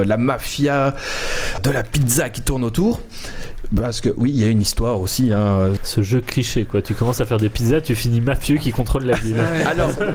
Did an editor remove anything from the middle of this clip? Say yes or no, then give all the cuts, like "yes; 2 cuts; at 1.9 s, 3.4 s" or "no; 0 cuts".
yes; 2 cuts; at 1.6 s, 5.8 s